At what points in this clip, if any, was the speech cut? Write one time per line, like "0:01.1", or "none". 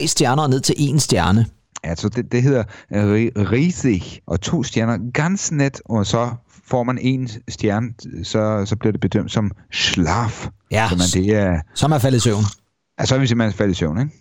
0:02.1
0:04.2